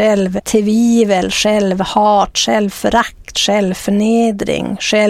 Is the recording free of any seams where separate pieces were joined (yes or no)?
yes